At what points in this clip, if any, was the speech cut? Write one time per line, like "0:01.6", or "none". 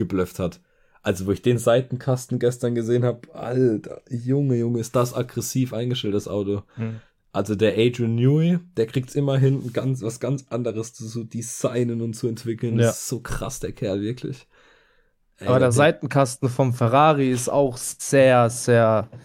none